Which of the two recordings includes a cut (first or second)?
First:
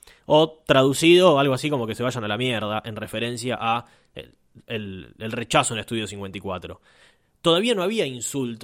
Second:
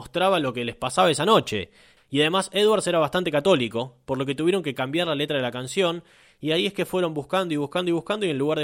second